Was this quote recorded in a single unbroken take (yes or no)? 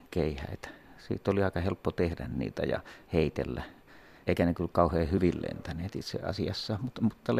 yes